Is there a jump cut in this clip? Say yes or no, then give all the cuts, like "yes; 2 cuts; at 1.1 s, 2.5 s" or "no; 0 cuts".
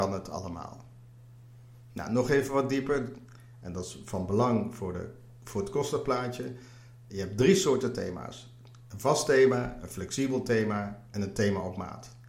no; 0 cuts